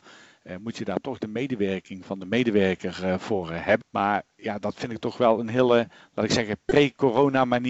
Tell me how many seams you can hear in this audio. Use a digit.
1